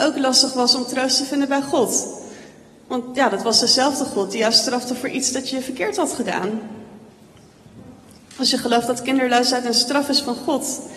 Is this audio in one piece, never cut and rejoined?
yes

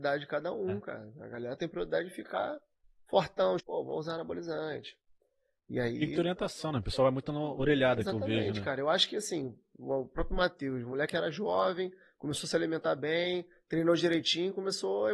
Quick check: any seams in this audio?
yes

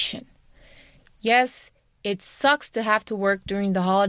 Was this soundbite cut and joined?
no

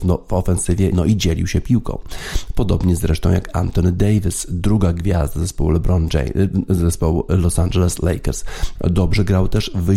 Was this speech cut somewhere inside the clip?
yes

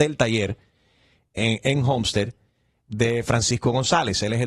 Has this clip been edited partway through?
no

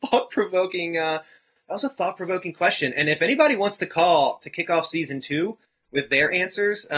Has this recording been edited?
no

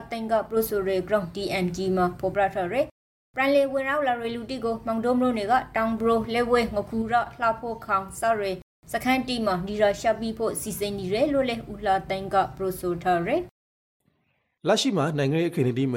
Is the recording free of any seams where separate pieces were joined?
yes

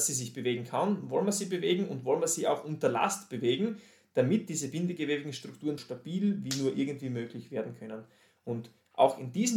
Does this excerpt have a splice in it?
yes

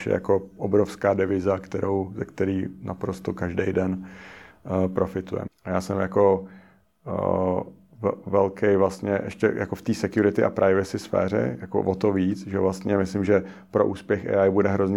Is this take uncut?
no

